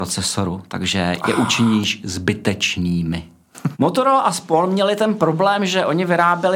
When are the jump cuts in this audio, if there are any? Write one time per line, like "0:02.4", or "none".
0:03.7